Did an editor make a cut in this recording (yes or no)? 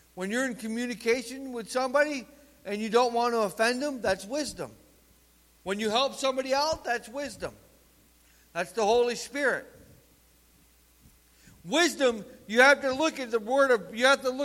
yes